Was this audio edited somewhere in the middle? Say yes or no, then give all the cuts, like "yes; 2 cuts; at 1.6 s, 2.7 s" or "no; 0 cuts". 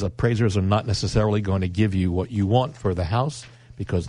no; 0 cuts